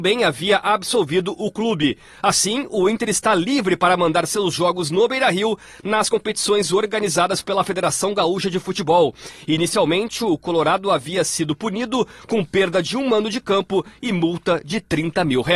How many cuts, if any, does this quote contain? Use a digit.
0